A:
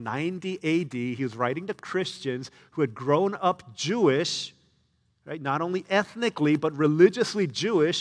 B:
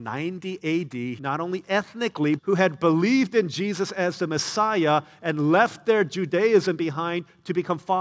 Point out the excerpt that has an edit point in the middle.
B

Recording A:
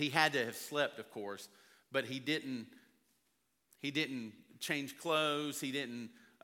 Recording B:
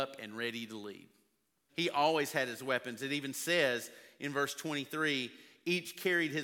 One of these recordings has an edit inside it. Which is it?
B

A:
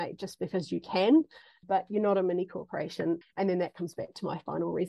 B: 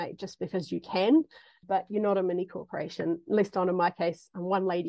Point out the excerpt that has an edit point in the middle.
A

